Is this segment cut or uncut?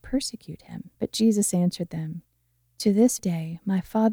cut